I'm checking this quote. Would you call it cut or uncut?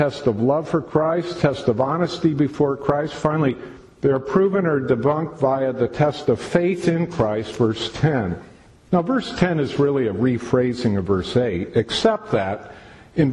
cut